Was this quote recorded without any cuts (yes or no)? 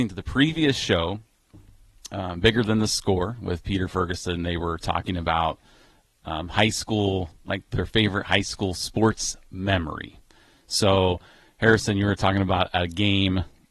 yes